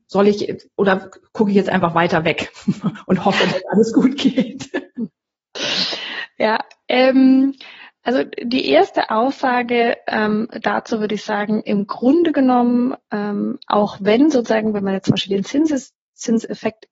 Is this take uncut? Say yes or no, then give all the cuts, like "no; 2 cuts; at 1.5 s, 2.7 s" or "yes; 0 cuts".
yes; 0 cuts